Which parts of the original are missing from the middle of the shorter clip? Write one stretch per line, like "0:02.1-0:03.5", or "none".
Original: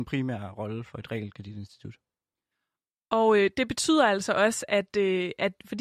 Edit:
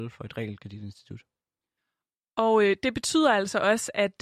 none